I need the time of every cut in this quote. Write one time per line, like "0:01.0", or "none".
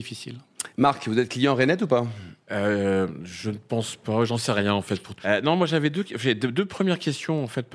0:05.2